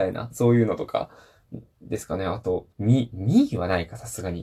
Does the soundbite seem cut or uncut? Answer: cut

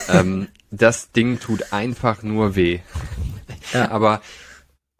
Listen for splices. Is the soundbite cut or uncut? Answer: cut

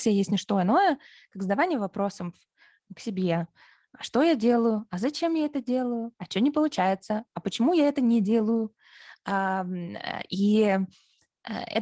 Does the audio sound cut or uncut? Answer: cut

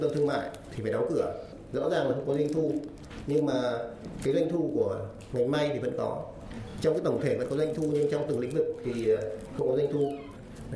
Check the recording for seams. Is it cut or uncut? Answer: uncut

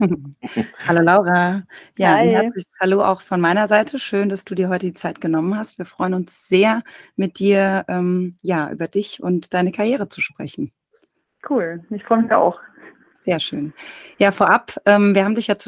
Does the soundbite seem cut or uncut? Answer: uncut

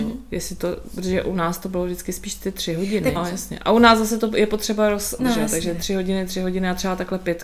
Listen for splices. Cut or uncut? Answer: cut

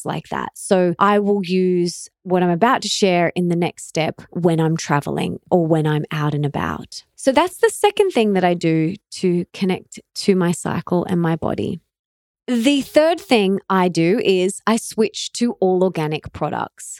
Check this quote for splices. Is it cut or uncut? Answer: uncut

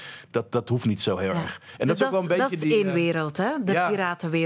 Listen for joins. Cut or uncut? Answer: uncut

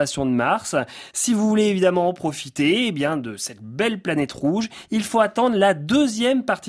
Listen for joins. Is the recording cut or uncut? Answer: uncut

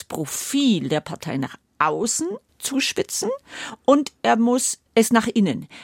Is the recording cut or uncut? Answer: cut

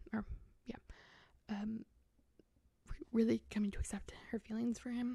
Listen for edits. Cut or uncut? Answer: uncut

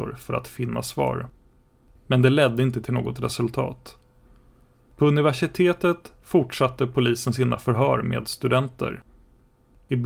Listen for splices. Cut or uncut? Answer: cut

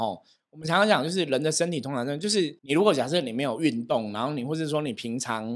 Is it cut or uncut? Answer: cut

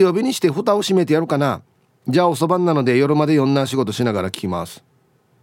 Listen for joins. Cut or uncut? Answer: uncut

